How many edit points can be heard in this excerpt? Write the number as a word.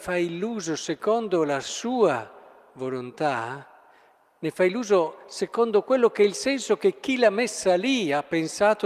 zero